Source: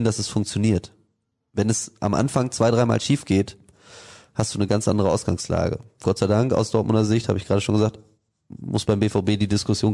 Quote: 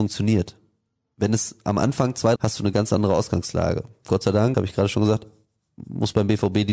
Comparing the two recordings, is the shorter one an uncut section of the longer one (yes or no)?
no